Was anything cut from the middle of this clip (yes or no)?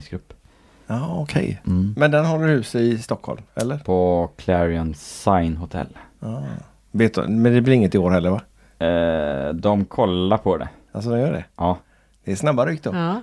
no